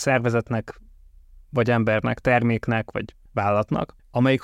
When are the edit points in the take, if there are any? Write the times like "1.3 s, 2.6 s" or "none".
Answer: none

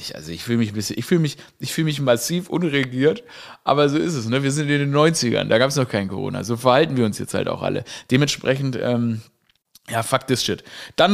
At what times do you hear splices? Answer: none

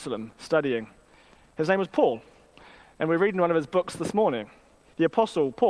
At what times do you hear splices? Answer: none

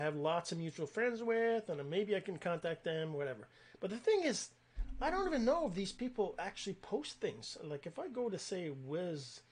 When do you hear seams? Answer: none

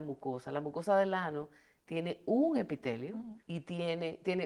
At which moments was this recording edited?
3.4 s

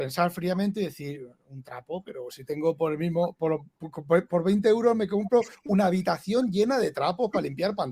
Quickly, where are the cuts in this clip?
none

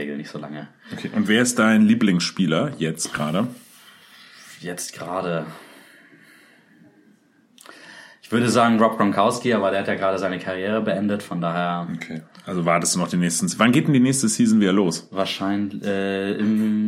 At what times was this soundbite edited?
none

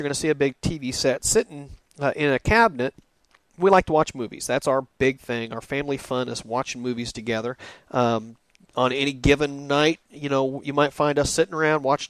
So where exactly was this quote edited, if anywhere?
10.6 s

